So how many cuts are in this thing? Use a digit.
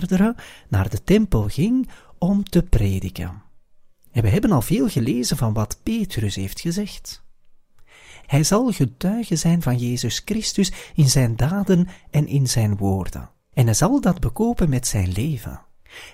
2